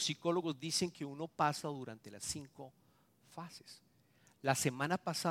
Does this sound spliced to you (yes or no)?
no